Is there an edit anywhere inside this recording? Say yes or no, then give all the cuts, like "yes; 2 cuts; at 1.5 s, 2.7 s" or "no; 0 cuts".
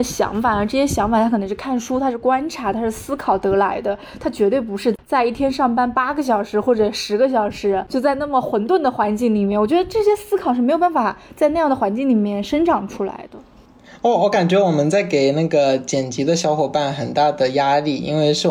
no; 0 cuts